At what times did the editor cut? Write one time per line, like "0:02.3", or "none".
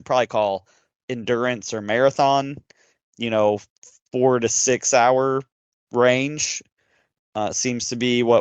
0:05.8